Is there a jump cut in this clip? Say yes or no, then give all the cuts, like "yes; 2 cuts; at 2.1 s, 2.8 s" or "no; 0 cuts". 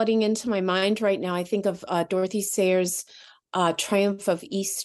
no; 0 cuts